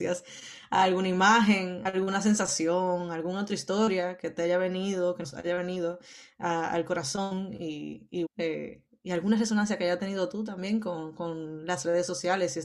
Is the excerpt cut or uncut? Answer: cut